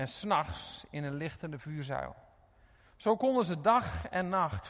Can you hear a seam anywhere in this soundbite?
no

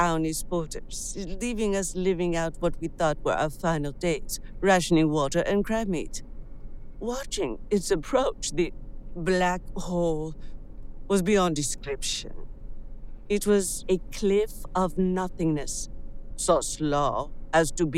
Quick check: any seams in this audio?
yes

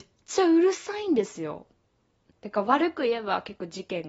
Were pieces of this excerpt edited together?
yes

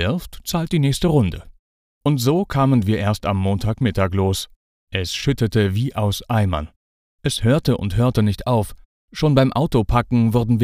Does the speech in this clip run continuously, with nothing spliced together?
yes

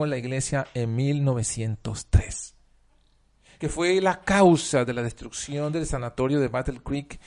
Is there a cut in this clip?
no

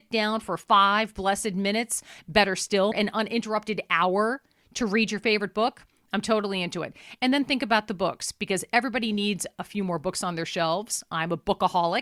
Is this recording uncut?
no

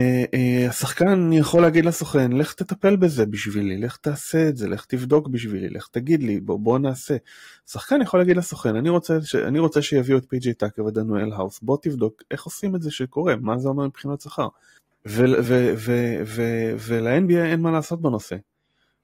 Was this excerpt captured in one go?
yes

